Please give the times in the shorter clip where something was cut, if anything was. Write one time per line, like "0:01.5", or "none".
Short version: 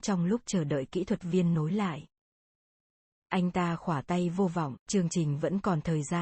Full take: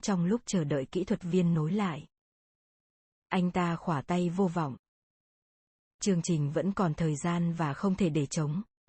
0:04.8